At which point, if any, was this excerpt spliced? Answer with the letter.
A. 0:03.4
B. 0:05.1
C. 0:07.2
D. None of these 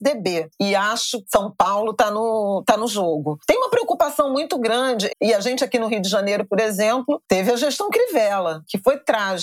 B